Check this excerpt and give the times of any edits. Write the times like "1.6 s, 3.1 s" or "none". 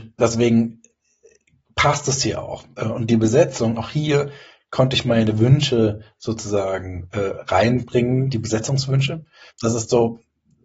9.5 s